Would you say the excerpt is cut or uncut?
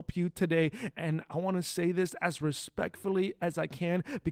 cut